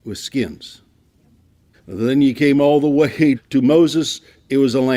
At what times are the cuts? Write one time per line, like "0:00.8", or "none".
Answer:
0:01.7
0:03.4